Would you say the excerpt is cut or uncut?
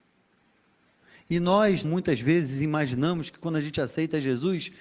cut